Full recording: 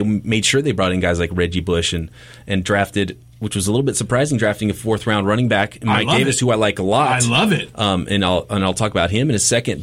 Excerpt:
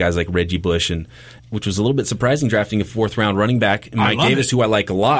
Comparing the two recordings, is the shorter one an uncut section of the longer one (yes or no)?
no